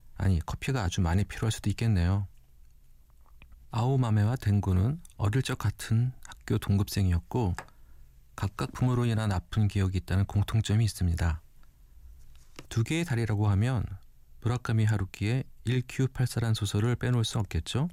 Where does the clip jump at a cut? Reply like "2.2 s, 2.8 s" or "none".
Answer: 3.6 s, 12.6 s